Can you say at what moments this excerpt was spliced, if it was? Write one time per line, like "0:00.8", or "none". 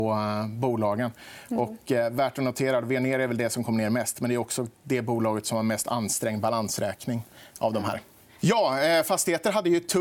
0:08.4